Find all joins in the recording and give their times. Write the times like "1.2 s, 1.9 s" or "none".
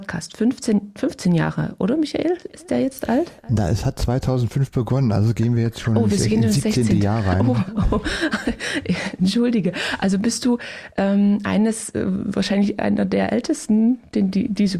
none